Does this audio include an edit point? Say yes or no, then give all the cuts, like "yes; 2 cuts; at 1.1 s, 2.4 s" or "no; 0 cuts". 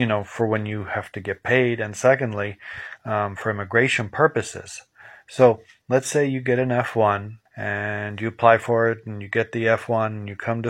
yes; 1 cut; at 7.5 s